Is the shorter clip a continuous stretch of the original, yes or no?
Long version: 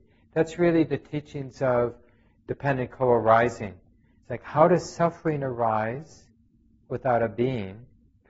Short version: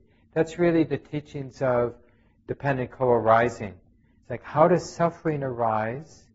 yes